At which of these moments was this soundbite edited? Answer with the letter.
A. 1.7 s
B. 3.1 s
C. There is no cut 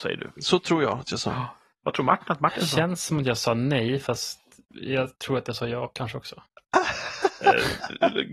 C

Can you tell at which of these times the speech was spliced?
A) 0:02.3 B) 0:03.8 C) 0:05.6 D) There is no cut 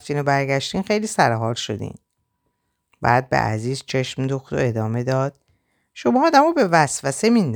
D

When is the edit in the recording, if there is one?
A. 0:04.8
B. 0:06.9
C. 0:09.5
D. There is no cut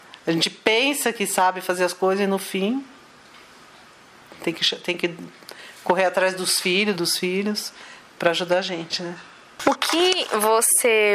B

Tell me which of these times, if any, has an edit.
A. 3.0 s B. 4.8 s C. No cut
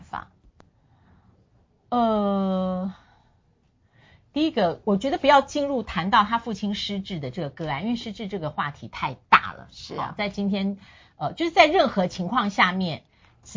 B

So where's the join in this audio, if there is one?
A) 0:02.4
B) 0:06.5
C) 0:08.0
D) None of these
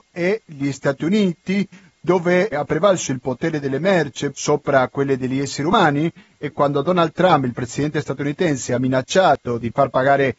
B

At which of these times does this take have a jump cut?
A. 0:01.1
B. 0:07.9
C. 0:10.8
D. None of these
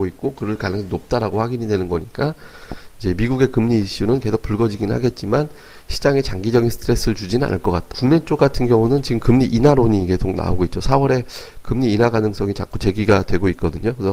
B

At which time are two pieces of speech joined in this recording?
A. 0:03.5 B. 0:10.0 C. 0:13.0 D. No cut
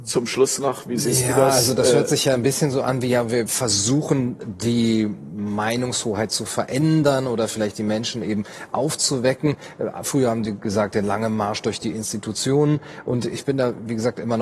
A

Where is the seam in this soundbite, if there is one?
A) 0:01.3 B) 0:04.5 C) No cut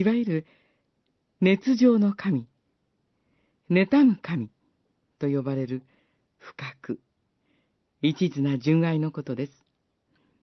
C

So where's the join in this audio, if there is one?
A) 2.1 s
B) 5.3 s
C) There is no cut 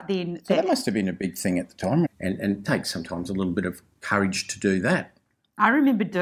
A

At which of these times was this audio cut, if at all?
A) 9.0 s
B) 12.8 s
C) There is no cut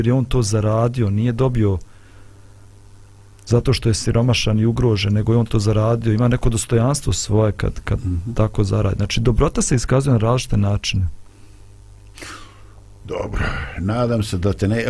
C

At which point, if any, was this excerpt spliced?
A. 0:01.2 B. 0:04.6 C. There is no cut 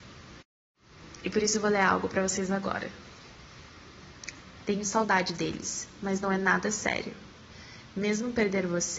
B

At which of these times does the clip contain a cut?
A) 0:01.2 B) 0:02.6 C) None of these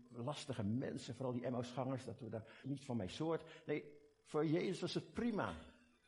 B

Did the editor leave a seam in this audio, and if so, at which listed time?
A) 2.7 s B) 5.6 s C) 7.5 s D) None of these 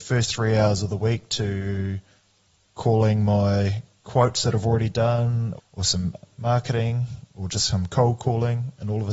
B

